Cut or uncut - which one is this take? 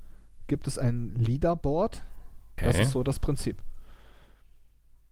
cut